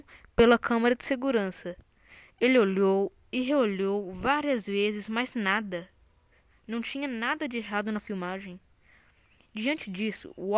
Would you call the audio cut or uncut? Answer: uncut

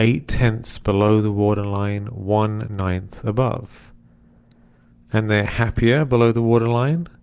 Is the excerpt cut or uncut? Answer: uncut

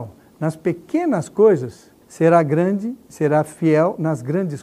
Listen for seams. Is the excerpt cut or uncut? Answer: cut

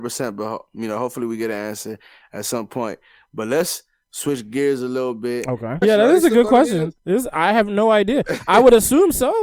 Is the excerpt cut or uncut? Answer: cut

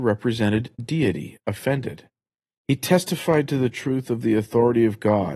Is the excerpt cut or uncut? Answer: uncut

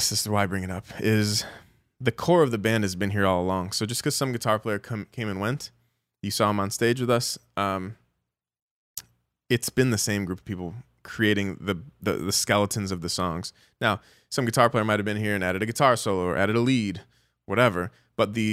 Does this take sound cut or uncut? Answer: uncut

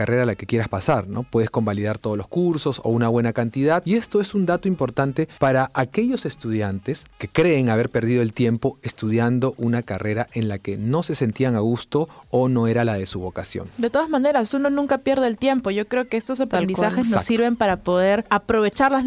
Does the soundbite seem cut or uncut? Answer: uncut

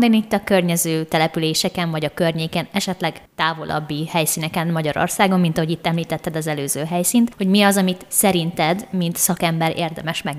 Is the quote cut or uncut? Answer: uncut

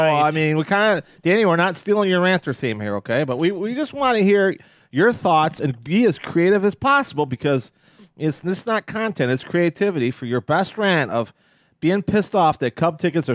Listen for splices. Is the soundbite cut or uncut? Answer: uncut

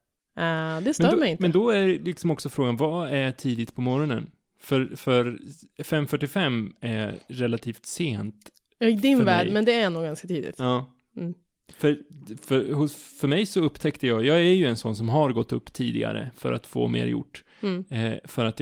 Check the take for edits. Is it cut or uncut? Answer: uncut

